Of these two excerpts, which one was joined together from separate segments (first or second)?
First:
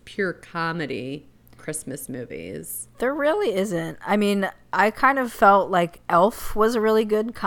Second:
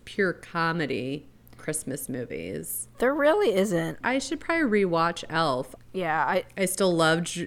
second